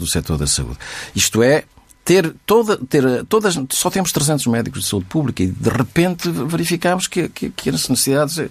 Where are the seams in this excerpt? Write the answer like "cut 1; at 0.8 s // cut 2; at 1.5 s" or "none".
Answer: none